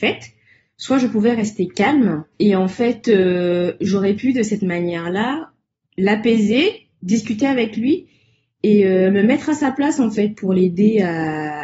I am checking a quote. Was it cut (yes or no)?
yes